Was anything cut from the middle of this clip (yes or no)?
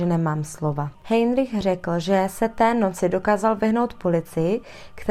yes